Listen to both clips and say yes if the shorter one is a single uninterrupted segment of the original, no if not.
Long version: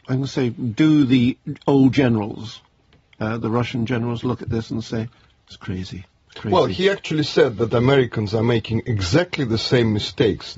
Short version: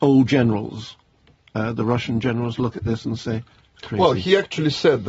no